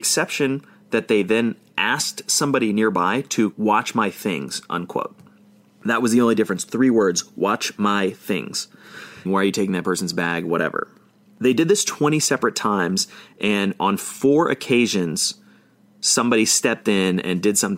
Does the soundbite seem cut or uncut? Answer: cut